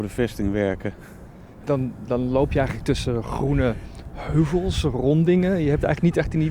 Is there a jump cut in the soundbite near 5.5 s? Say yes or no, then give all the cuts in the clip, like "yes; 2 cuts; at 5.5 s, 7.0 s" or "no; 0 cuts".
no; 1 cut; at 1.6 s